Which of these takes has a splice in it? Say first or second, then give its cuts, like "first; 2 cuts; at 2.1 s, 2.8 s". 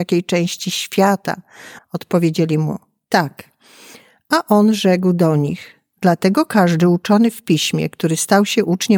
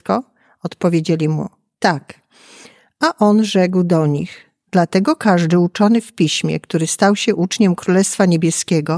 first; 1 cut; at 1.8 s